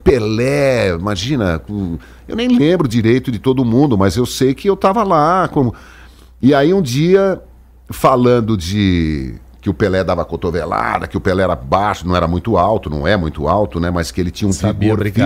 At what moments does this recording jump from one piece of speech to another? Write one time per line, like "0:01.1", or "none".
none